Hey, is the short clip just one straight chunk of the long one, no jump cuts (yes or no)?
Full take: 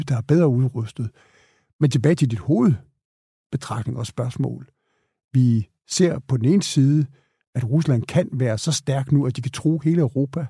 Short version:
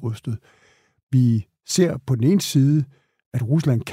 no